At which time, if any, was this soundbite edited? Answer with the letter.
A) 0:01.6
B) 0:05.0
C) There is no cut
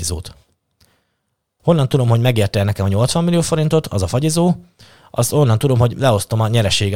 A